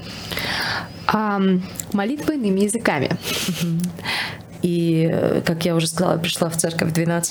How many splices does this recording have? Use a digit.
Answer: 1